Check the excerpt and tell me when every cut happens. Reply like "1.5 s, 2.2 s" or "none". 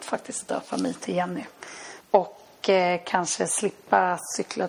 2.0 s

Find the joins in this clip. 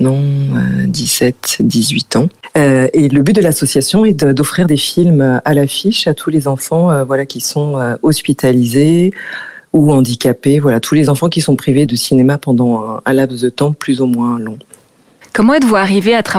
11.9 s

